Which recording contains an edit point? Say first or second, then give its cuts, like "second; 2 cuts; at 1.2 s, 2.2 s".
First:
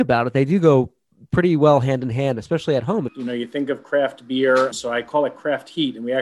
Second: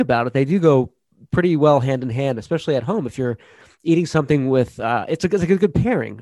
first; 2 cuts; at 3.1 s, 4.7 s